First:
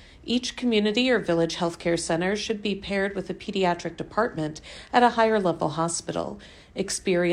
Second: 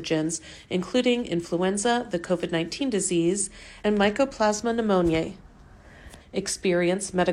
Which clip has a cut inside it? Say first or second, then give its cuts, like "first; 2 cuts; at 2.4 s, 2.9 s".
second; 1 cut; at 6.2 s